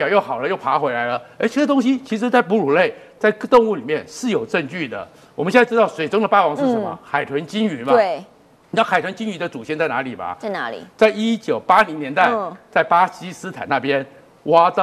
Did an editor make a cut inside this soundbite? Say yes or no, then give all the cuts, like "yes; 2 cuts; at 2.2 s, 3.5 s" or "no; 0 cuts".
no; 0 cuts